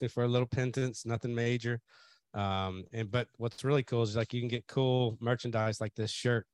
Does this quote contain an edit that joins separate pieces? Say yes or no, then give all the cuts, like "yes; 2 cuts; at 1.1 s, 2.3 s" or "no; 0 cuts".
no; 0 cuts